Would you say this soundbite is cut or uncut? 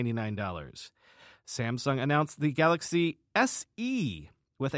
uncut